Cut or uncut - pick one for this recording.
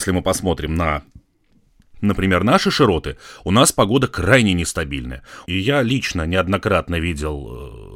cut